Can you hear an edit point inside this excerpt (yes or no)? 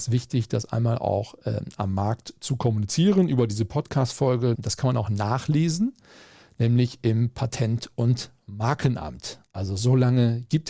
yes